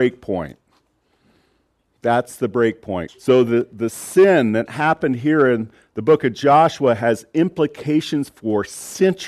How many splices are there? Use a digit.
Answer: 1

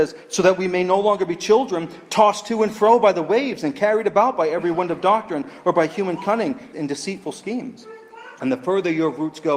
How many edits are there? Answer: 2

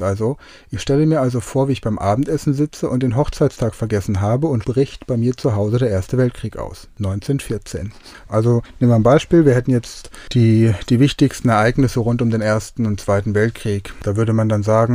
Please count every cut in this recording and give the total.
2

